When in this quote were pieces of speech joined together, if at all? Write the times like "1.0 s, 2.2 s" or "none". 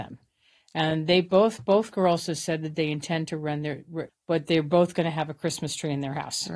4.1 s